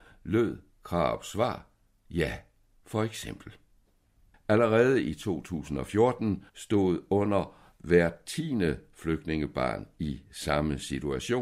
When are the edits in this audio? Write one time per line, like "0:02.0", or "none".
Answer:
0:04.3
0:06.5